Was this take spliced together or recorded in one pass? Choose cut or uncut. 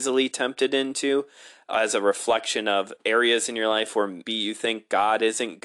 cut